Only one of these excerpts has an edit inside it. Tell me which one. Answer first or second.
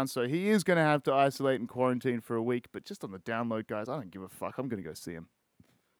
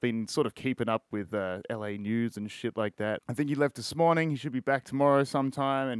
second